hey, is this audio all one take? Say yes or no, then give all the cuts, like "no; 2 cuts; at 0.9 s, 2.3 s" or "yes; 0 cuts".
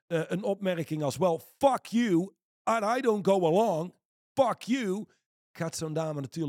yes; 0 cuts